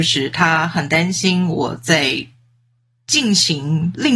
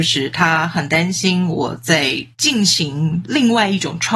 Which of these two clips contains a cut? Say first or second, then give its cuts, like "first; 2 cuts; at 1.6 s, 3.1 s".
second; 1 cut; at 2.3 s